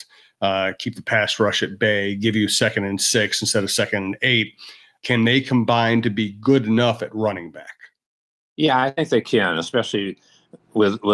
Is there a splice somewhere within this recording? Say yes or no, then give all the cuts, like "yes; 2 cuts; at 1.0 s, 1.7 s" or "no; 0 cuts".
yes; 1 cut; at 5.0 s